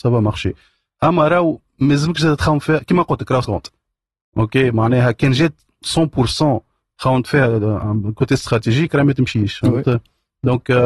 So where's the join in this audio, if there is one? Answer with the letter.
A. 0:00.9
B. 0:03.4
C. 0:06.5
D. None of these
B